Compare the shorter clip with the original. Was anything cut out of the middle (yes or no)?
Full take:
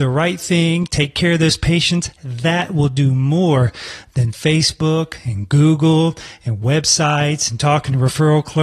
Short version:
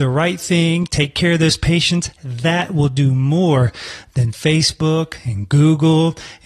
no